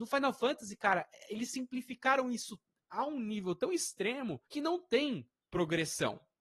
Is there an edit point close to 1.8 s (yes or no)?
no